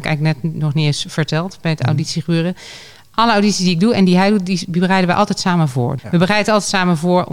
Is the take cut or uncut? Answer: cut